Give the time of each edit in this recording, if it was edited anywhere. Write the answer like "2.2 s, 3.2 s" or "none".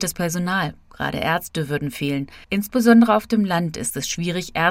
2.4 s